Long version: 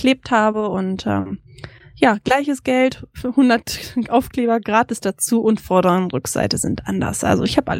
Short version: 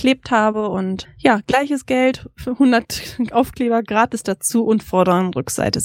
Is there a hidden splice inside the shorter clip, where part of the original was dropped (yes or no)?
yes